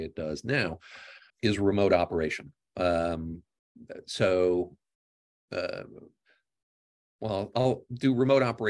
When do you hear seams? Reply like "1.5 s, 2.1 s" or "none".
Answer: 1.3 s